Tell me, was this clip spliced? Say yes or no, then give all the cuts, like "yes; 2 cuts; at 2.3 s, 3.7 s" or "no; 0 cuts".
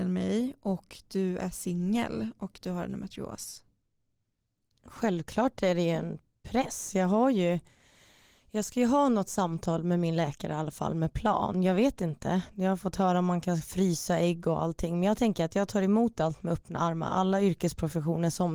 no; 0 cuts